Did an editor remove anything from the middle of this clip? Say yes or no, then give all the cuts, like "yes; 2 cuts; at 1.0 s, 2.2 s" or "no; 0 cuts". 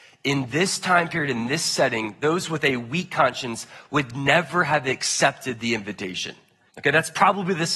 yes; 1 cut; at 6.7 s